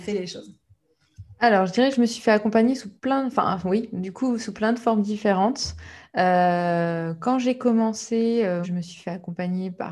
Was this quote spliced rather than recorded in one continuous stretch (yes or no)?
yes